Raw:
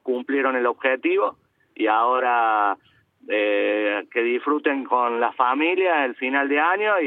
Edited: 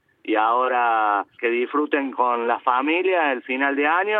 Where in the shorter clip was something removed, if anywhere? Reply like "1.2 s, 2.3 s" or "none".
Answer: 1.4 s